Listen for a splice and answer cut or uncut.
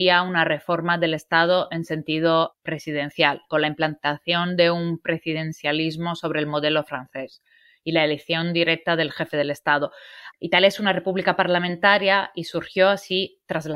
cut